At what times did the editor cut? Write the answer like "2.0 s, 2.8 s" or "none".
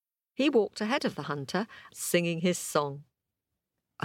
1.9 s